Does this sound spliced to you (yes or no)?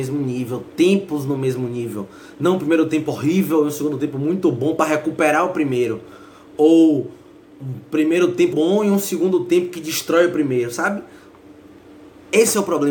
yes